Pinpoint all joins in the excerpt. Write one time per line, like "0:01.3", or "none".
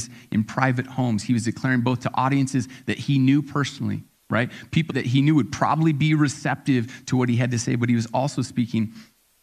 0:04.9